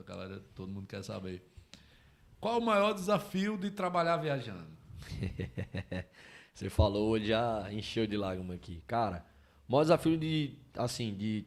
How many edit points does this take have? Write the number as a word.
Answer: zero